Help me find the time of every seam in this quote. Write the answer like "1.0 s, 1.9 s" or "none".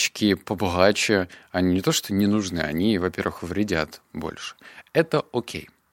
none